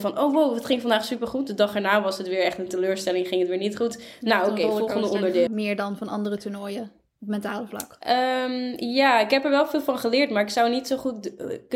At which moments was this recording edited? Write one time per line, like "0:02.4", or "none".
0:05.5